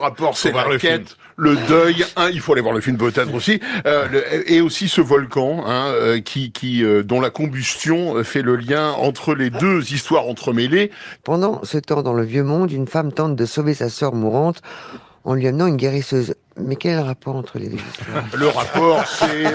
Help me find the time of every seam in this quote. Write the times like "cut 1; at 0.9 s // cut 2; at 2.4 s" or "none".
cut 1; at 11.2 s // cut 2; at 18.3 s